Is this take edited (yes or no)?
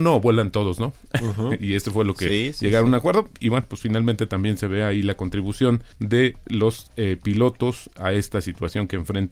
yes